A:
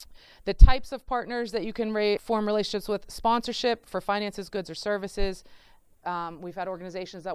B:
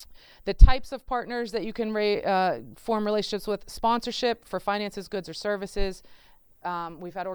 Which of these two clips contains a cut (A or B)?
A